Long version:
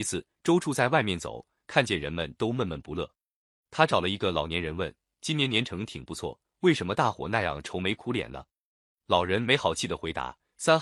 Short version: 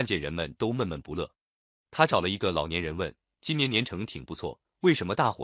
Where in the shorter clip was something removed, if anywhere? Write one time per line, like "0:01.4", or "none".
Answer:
none